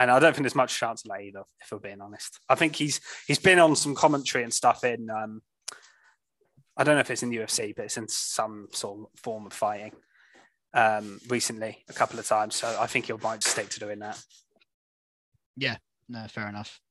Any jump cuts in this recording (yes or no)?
yes